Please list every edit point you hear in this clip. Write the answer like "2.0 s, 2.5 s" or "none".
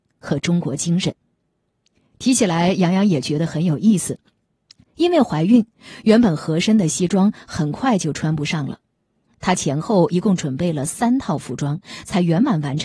none